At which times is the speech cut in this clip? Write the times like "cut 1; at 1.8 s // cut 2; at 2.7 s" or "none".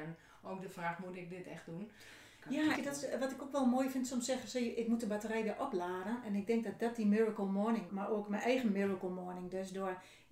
cut 1; at 2.8 s // cut 2; at 7.9 s